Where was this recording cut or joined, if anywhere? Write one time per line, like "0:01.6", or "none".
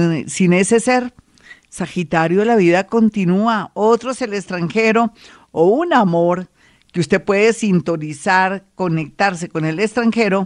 none